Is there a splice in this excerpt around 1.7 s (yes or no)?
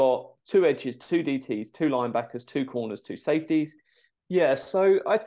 no